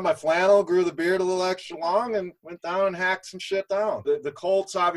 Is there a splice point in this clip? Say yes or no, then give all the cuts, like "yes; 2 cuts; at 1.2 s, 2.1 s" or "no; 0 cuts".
yes; 2 cuts; at 2.4 s, 4.0 s